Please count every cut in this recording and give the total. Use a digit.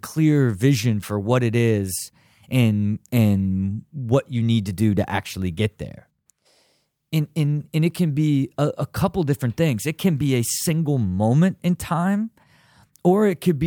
0